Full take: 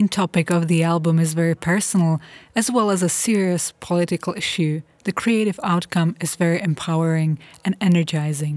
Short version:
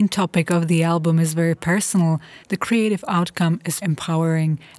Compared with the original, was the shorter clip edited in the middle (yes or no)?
yes